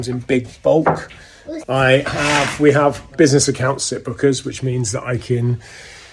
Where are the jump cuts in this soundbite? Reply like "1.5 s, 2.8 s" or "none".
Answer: 1.6 s, 3.1 s